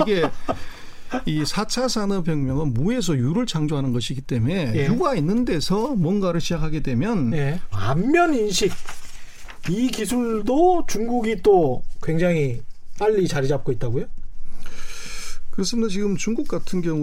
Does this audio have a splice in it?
yes; 1 cut; at 7.7 s

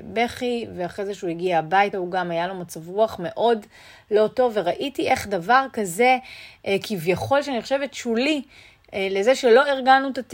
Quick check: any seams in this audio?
no; 0 cuts

